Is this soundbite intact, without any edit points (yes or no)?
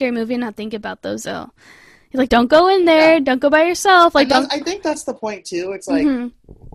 yes